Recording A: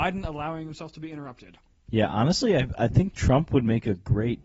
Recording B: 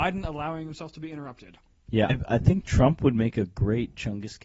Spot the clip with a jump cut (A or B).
B